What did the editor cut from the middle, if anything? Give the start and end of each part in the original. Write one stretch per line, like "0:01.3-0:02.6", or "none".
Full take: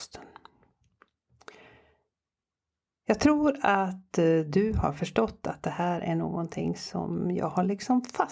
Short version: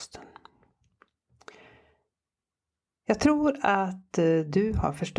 none